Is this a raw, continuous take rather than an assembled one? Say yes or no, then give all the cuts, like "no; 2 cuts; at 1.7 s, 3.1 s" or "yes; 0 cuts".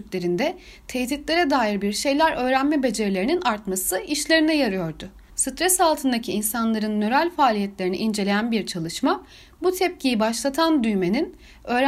no; 1 cut; at 5.3 s